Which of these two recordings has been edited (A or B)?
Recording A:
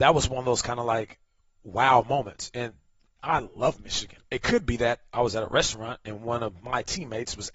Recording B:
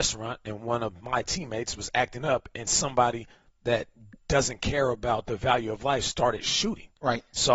A